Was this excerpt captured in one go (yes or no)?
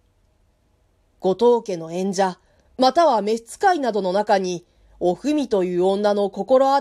yes